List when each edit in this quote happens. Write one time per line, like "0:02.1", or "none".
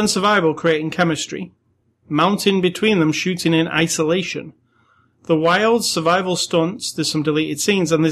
none